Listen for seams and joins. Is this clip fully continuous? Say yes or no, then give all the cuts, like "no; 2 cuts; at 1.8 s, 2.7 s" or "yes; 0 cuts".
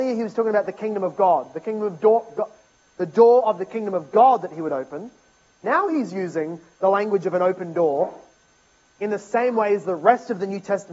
yes; 0 cuts